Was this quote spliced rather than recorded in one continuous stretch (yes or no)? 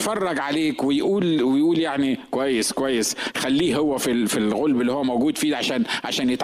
no